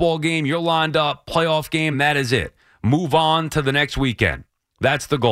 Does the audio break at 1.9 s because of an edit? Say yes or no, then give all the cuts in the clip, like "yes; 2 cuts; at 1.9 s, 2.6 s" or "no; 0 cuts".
no; 0 cuts